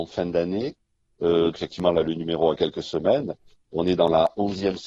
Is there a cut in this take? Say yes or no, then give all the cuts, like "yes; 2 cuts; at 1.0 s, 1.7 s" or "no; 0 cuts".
yes; 1 cut; at 1.5 s